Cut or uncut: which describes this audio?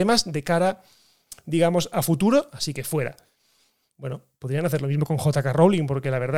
uncut